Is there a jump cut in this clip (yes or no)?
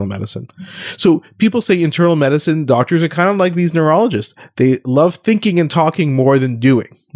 no